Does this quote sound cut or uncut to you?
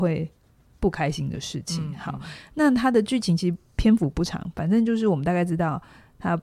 uncut